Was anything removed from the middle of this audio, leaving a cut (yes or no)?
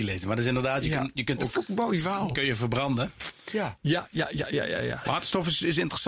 yes